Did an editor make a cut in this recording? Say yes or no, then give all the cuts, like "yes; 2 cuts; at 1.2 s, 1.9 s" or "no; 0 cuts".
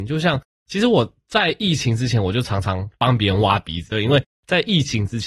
yes; 1 cut; at 3.9 s